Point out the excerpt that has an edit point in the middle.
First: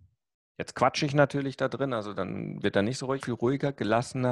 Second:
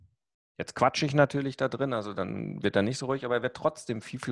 first; 1 cut; at 3.2 s

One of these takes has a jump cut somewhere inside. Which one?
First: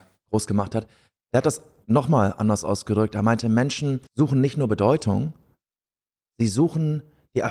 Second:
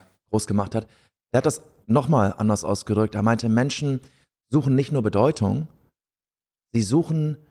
first; 1 cut; at 4.1 s

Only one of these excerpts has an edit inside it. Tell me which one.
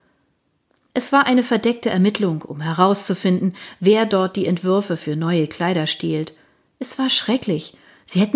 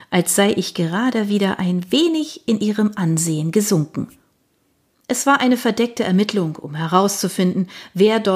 second; 1 cut; at 4.9 s

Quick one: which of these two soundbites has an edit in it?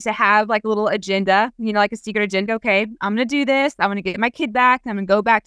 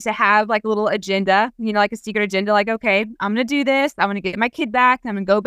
first; 1 cut; at 2.5 s

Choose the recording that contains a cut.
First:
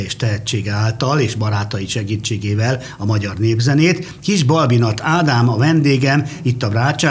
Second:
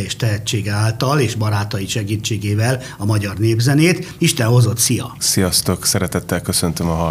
second; 2 cuts; at 4.2 s, 5.2 s

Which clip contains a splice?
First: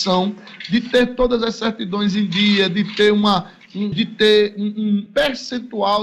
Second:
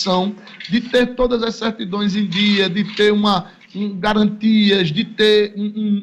first; 2 cuts; at 3.9 s, 5.1 s

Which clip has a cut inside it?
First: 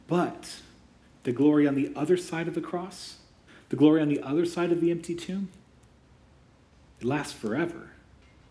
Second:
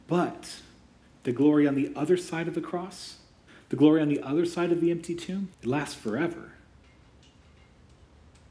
second; 1 cut; at 5.5 s

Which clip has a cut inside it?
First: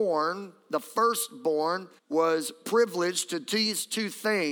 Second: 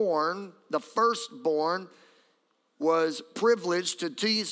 first; 1 cut; at 2.0 s

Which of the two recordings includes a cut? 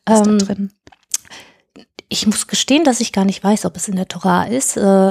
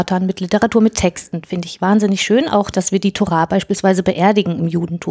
second; 1 cut; at 2.7 s

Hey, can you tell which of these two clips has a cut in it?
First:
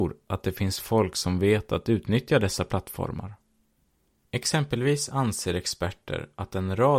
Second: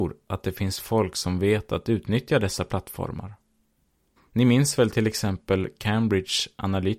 second; 1 cut; at 4.2 s

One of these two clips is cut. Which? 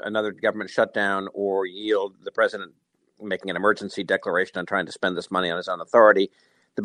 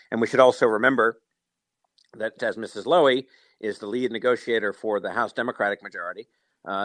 second; 1 cut; at 2.4 s

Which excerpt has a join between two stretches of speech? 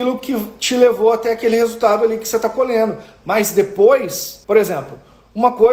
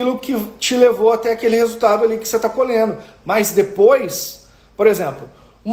first; 1 cut; at 4.4 s

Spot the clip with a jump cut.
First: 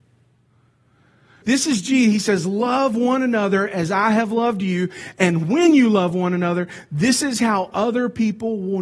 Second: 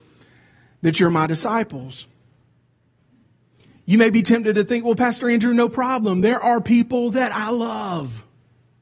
first; 1 cut; at 1.4 s

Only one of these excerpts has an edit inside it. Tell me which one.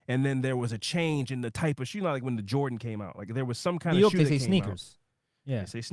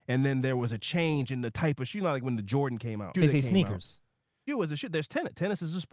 second; 2 cuts; at 3.1 s, 4.5 s

